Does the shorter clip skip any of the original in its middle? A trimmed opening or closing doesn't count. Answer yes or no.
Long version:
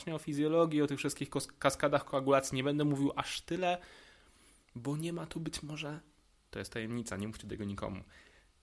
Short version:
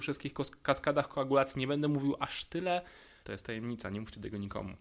yes